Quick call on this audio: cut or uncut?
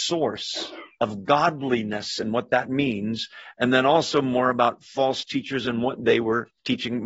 uncut